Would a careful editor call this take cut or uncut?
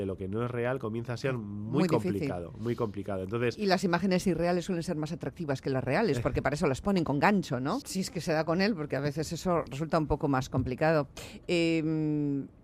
cut